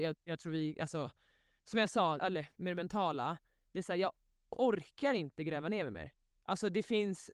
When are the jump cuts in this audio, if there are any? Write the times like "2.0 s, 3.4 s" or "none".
2.2 s